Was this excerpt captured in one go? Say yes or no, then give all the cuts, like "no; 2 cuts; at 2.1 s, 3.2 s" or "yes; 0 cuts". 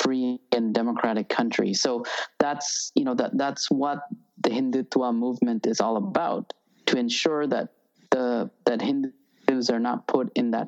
yes; 0 cuts